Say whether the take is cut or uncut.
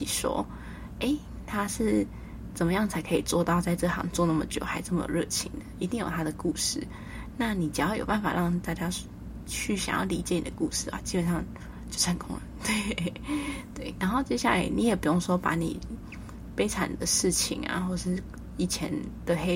uncut